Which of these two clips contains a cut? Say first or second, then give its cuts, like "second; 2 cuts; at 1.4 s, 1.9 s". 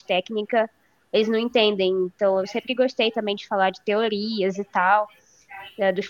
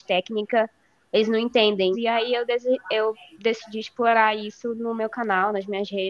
second; 1 cut; at 1.9 s